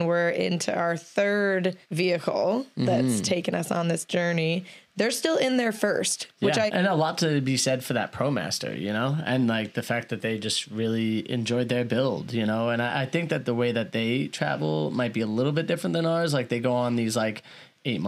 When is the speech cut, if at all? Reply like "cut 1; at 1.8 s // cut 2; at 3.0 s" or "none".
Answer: cut 1; at 1.8 s // cut 2; at 6.7 s